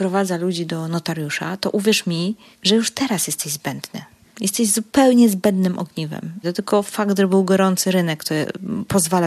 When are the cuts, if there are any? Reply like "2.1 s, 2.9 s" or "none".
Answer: 6.4 s